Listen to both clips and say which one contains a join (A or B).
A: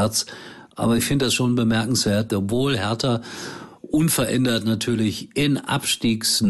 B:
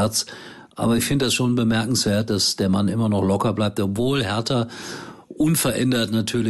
A